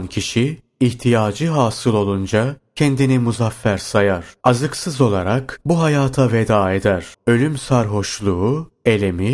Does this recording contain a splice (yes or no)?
yes